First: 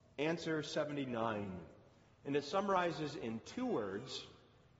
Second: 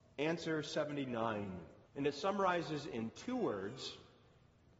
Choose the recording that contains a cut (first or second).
second